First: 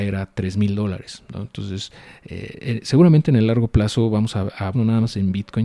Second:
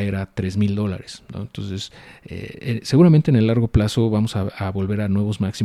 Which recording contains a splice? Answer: first; 1 cut; at 4.7 s

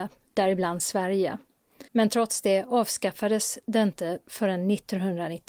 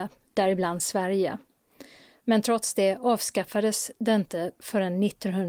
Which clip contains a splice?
first; 1 cut; at 1.9 s

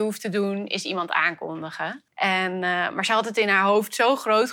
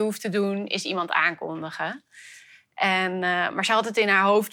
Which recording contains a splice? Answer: first; 1 cut; at 2.1 s

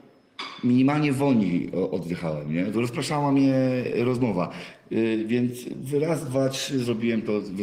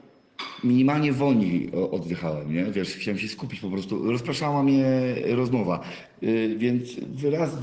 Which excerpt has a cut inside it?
first; 1 cut; at 2.7 s

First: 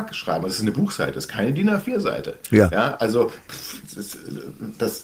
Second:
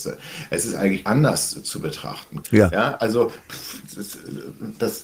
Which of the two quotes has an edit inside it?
second; 2 cuts; at 1.0 s, 2.4 s

